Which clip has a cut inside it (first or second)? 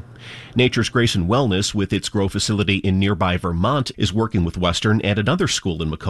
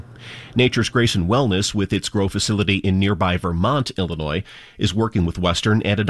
first